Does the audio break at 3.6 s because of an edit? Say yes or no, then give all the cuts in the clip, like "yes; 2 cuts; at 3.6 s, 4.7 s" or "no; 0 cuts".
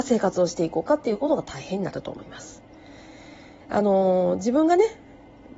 yes; 1 cut; at 3.6 s